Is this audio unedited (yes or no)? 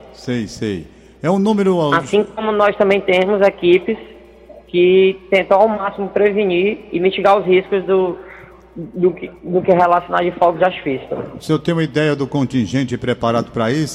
yes